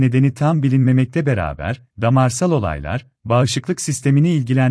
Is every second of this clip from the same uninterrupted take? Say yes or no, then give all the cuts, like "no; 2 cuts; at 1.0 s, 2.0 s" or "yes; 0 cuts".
no; 1 cut; at 1.9 s